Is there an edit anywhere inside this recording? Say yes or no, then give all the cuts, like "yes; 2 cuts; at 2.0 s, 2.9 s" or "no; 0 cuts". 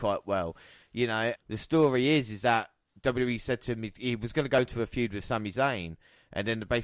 yes; 1 cut; at 1.4 s